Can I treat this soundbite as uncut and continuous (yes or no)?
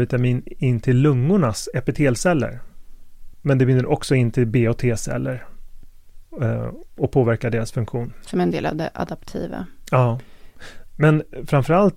no